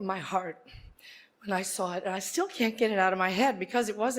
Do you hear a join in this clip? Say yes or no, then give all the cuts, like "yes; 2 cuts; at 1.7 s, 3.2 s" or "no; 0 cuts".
no; 0 cuts